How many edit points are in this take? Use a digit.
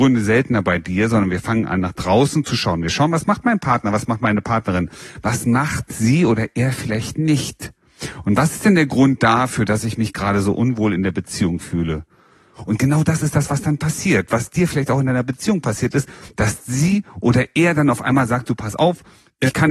1